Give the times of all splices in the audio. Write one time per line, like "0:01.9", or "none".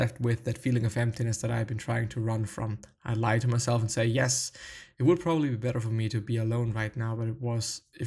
none